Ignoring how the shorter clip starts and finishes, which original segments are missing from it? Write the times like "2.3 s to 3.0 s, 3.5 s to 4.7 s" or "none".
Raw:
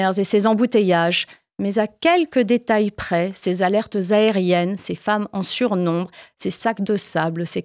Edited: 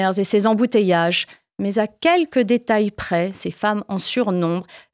3.3 s to 4.8 s